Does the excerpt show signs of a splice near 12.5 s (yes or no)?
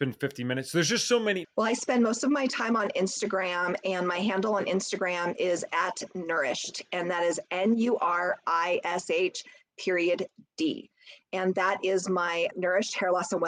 yes